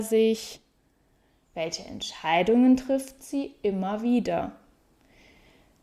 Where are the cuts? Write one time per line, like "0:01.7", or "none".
0:01.4